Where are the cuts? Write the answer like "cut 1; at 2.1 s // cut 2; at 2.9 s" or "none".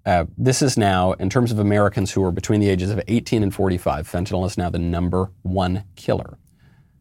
none